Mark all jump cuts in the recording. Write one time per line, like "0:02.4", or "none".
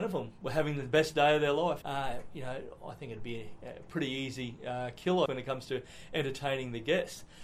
0:01.8
0:05.3